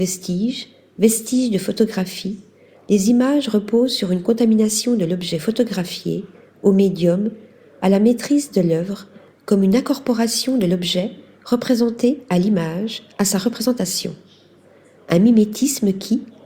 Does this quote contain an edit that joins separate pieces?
no; 0 cuts

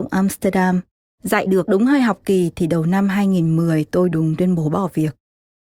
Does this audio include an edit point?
yes; 1 cut; at 4.1 s

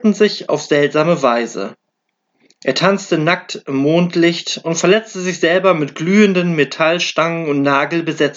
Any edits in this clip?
no; 0 cuts

